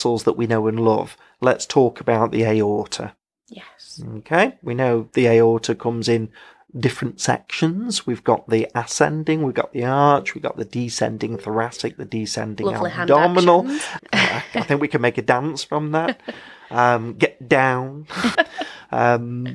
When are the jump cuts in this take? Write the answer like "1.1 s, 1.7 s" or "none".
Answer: 14.0 s, 18.3 s